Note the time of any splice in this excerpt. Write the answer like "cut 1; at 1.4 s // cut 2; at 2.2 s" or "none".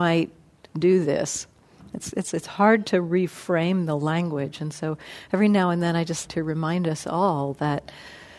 cut 1; at 6.3 s